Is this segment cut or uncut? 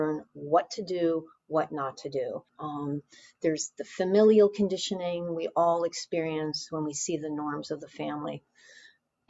cut